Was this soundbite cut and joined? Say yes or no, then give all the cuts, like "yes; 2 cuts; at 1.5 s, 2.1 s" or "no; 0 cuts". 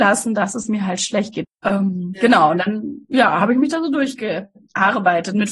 yes; 1 cut; at 1.4 s